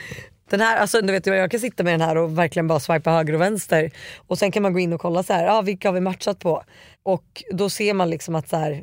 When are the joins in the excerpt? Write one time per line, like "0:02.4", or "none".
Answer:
0:01.0